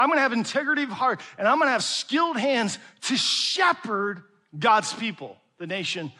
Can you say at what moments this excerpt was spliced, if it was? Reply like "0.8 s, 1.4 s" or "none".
none